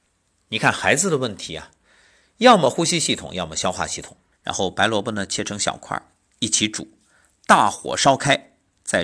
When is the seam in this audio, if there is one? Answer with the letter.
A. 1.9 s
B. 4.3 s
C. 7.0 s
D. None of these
B